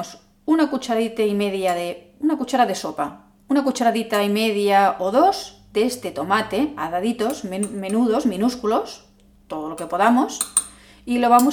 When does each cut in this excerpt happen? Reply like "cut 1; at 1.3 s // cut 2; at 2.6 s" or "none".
none